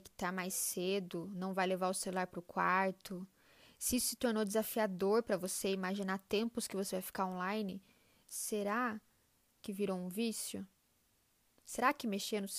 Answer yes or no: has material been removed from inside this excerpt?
no